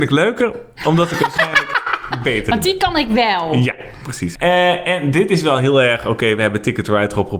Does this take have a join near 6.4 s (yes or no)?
no